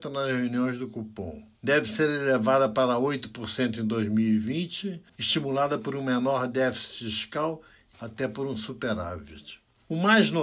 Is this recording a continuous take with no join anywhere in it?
no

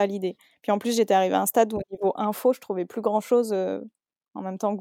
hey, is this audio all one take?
yes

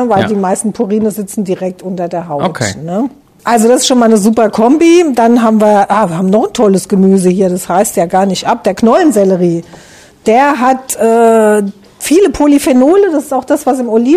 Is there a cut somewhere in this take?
no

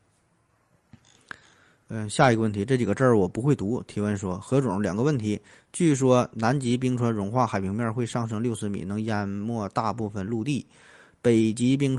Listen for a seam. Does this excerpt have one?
no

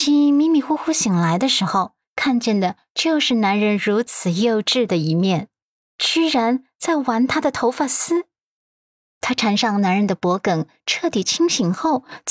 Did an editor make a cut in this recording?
yes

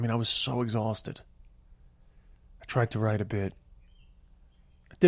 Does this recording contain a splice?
no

